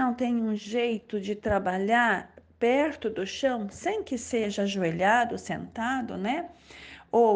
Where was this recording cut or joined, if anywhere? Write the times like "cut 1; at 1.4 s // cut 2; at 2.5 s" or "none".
none